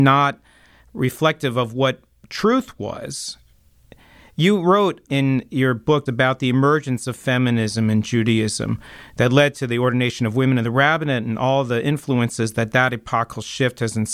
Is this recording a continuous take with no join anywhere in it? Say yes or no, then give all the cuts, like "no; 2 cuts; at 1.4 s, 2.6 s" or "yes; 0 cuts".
no; 1 cut; at 6.1 s